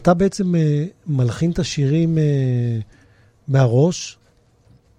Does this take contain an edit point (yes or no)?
no